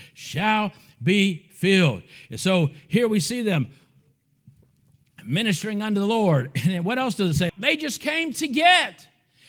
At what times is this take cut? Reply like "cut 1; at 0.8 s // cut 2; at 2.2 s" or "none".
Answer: cut 1; at 7.5 s